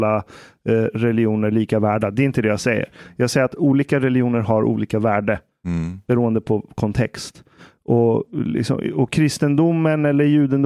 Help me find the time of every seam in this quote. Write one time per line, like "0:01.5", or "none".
none